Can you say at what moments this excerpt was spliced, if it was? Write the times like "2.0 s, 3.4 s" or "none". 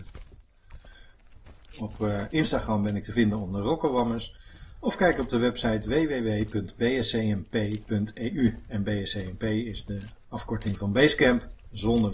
1.7 s